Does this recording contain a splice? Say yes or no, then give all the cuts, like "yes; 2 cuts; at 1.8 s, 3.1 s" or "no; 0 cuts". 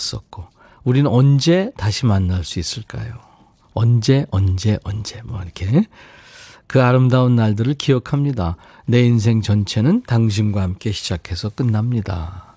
no; 0 cuts